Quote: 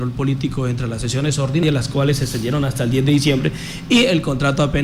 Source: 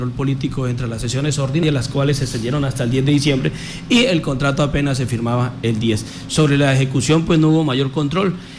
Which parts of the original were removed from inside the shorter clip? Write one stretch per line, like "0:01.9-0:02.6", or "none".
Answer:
none